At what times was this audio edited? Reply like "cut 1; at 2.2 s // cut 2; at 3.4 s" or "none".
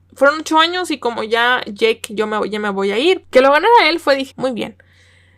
cut 1; at 3.2 s // cut 2; at 4.3 s